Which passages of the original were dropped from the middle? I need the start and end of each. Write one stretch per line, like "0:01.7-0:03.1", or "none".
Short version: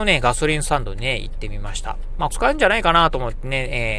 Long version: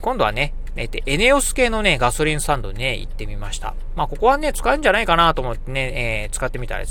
0:04.1-0:04.5